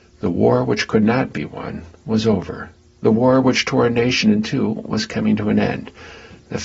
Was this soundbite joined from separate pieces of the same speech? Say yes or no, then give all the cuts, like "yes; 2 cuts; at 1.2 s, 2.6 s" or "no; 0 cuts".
no; 0 cuts